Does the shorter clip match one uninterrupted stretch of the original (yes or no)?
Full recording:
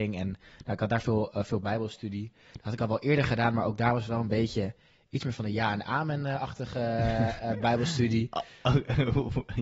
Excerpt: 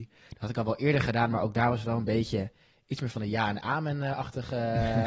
yes